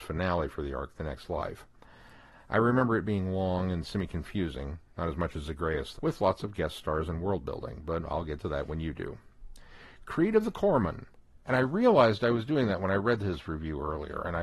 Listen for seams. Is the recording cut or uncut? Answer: cut